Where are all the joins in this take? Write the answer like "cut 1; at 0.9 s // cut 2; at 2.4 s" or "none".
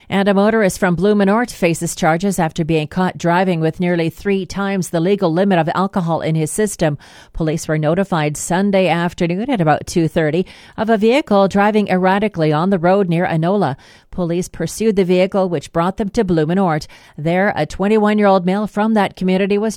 none

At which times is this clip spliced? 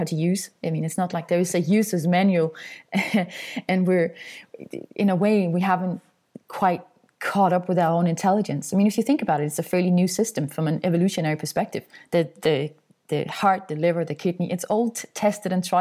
none

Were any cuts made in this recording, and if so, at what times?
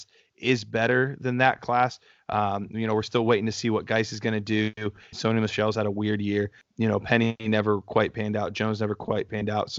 cut 1; at 5.1 s

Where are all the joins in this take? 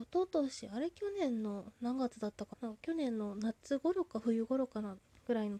cut 1; at 2.5 s

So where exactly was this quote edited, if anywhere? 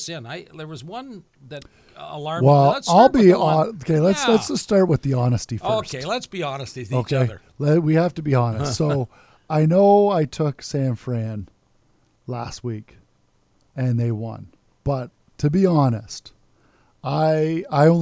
none

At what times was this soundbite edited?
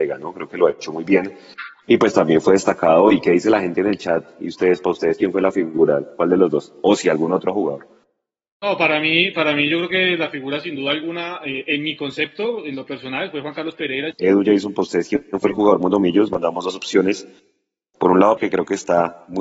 cut 1; at 14.1 s // cut 2; at 18.4 s

